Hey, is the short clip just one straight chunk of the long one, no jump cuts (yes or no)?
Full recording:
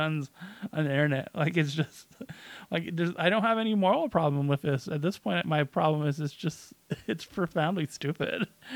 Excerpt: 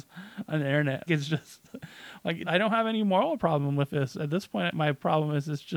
no